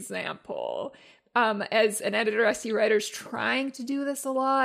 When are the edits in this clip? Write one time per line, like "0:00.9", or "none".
none